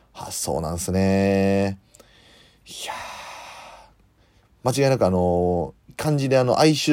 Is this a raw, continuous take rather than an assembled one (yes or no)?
no